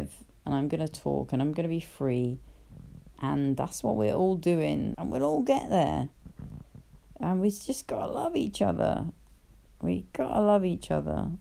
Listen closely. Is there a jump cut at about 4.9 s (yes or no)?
yes